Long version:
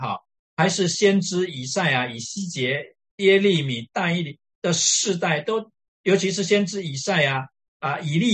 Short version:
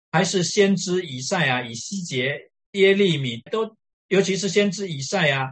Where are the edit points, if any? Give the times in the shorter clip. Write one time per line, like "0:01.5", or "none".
0:03.5